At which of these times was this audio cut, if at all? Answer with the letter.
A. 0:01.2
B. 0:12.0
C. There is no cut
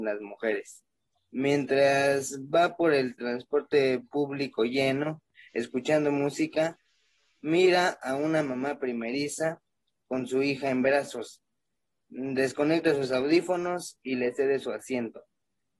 A